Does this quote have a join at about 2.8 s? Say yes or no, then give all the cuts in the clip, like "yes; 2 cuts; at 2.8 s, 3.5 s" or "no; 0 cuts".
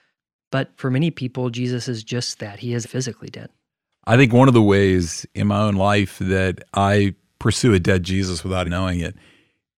yes; 2 cuts; at 2.8 s, 8.6 s